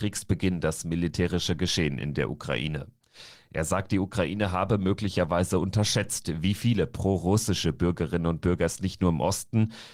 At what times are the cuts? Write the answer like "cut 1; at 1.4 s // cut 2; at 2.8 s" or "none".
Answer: none